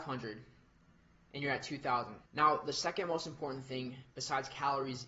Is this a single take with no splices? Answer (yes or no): no